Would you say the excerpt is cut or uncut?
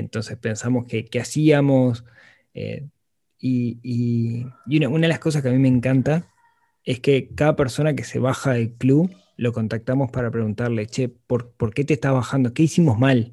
uncut